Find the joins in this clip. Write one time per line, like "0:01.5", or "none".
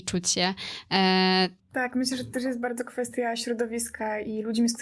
0:01.6